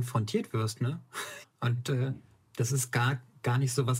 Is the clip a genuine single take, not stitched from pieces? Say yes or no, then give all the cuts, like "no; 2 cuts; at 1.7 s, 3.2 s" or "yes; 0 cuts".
no; 1 cut; at 1.4 s